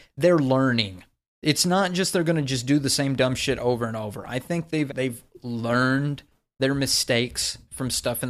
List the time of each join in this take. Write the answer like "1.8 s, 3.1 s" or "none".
4.9 s